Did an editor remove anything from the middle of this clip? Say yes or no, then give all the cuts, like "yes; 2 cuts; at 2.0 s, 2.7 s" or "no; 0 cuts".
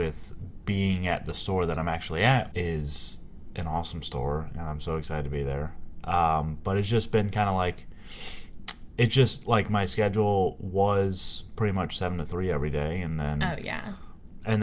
yes; 1 cut; at 2.5 s